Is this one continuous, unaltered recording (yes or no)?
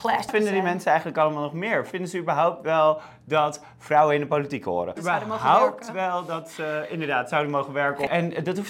yes